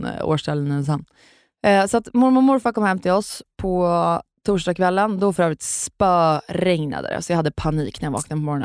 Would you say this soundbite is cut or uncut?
uncut